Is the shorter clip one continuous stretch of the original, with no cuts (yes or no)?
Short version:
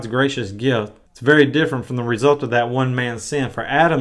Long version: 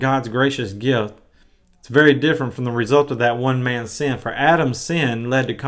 no